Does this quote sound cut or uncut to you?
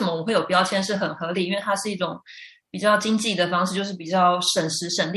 uncut